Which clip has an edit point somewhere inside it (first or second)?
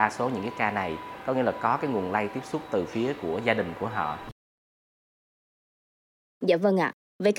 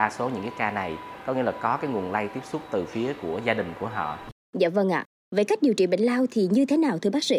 second